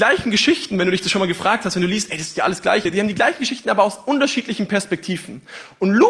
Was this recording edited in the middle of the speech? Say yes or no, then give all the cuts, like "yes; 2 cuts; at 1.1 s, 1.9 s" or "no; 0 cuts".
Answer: no; 0 cuts